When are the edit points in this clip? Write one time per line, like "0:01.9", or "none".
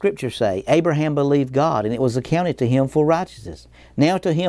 none